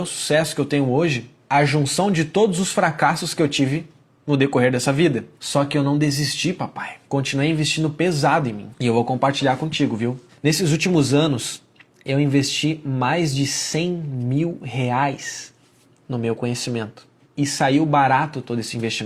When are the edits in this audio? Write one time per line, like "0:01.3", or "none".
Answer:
none